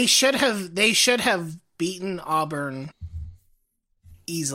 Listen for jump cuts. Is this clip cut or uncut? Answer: uncut